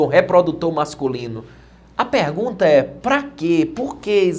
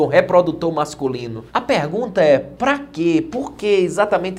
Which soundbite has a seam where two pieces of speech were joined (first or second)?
second